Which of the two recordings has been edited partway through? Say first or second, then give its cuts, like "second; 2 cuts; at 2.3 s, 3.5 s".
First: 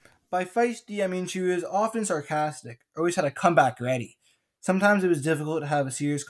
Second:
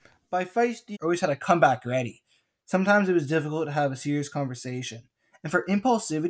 second; 1 cut; at 0.9 s